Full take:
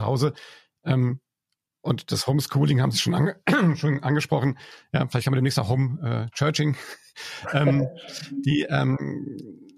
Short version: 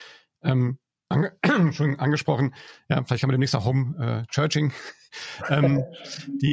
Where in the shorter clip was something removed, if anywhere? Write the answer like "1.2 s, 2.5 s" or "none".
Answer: 1.1 s